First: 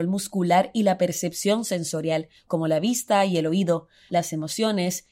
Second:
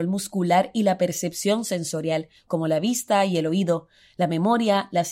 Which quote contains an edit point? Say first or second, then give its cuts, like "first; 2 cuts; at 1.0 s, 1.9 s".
first; 1 cut; at 4.1 s